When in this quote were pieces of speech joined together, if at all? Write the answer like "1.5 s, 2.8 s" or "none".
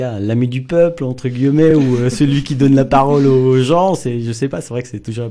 none